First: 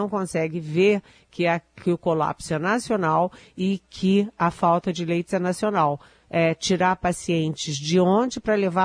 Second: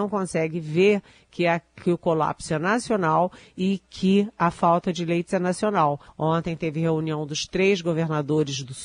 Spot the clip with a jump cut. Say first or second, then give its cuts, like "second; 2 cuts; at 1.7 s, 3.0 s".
second; 1 cut; at 6.1 s